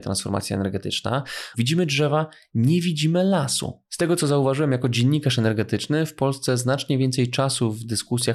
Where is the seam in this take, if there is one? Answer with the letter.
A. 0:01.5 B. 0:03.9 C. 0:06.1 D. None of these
A